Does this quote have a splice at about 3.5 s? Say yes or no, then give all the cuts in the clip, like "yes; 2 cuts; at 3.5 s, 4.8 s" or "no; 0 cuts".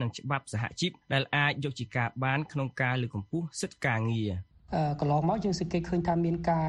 no; 1 cut; at 1.0 s